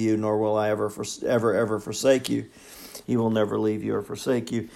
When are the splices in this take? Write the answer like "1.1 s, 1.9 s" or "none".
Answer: 3.0 s

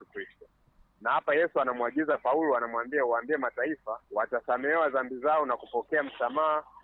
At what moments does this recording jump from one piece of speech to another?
4.0 s

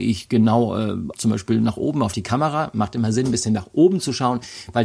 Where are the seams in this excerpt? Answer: 1.1 s

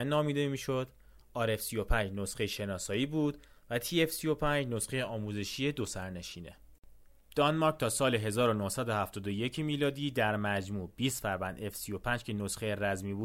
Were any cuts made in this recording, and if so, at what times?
none

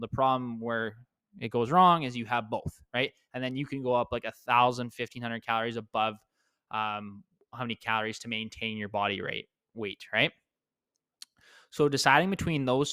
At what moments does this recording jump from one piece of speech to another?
none

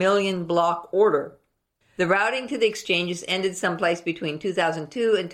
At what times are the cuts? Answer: 1.8 s

